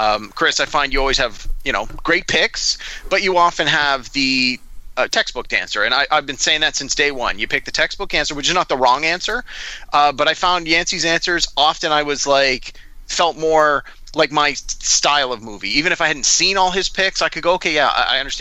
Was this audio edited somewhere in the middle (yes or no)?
no